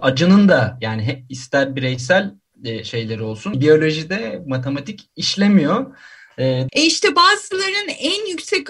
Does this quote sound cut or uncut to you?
cut